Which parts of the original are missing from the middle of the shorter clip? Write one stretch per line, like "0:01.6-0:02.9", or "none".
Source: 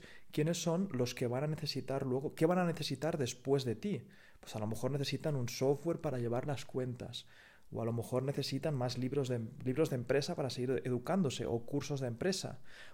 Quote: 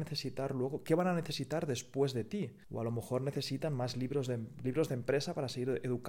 0:04.1-0:07.6